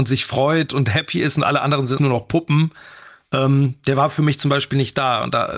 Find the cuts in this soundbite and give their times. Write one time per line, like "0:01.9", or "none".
0:02.0